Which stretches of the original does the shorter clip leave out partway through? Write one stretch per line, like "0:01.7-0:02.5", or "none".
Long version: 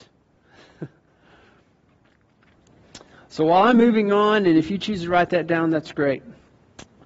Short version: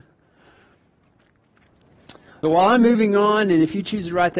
0:03.3-0:03.4